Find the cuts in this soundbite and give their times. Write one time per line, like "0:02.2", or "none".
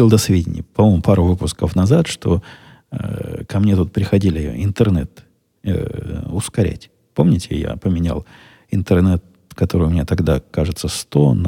none